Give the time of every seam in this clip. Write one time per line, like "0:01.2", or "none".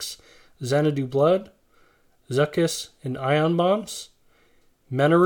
none